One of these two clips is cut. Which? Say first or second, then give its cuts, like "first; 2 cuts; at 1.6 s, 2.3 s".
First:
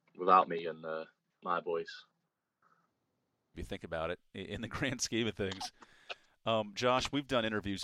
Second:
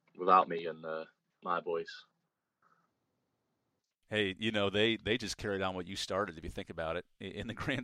first; 1 cut; at 3.5 s